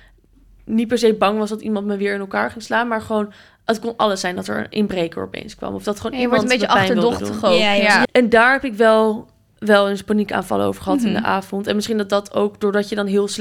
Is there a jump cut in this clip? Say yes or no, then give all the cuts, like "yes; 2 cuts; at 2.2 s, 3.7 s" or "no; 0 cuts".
yes; 1 cut; at 8.0 s